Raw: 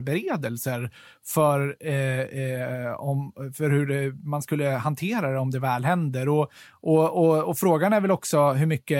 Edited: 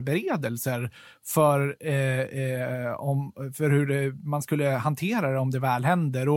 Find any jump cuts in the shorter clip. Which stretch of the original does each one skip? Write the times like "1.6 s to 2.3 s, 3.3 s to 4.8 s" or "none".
none